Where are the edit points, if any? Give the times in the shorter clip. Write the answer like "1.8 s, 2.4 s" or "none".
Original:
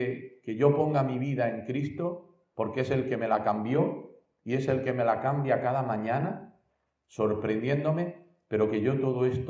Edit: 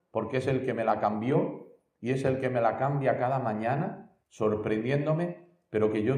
4.2 s